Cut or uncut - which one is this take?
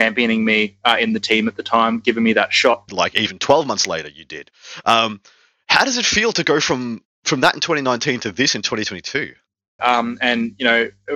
cut